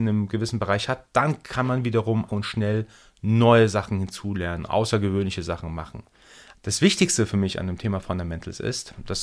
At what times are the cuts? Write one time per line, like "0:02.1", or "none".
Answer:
0:02.3
0:06.5